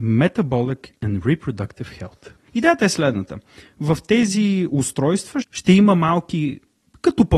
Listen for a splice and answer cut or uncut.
cut